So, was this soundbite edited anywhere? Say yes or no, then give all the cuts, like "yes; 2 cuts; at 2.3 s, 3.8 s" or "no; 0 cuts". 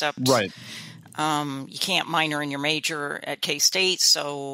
no; 0 cuts